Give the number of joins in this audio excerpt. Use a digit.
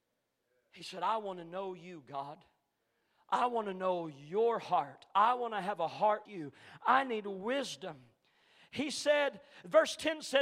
1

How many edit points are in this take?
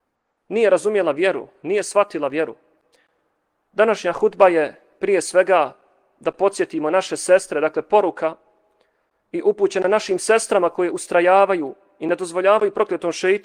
0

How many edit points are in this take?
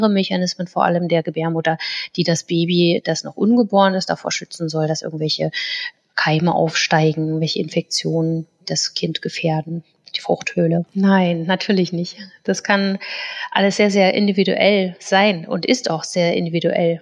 1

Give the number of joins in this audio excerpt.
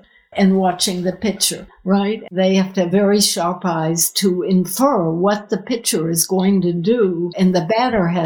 0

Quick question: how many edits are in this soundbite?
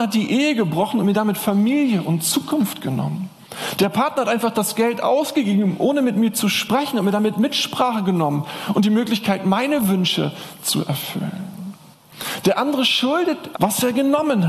1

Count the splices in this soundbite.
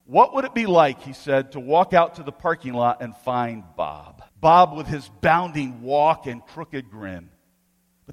1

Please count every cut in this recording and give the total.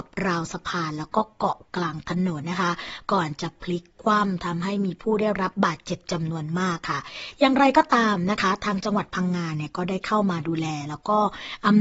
1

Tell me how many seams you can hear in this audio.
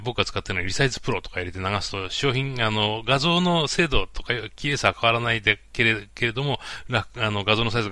0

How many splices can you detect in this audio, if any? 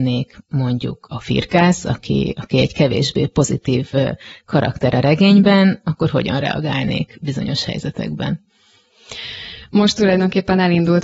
0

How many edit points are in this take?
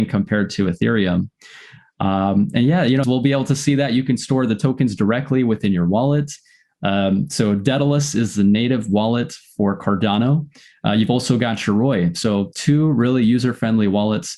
1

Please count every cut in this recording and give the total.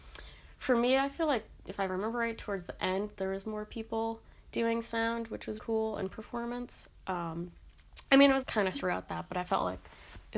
2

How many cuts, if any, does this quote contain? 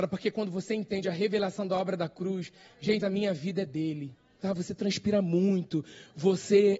2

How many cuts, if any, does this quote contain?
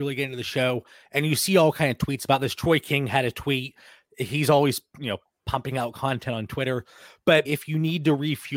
1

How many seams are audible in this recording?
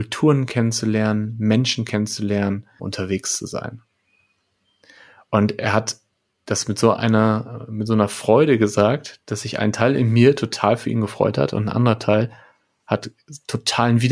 1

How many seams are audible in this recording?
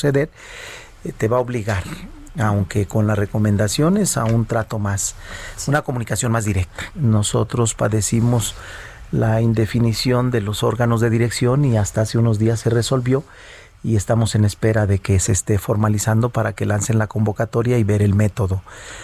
1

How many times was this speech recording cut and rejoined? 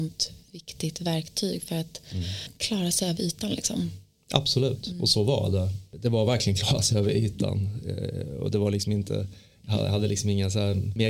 0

